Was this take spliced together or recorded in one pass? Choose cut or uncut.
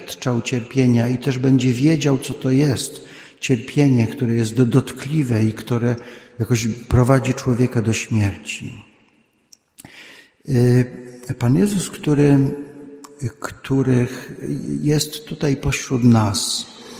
uncut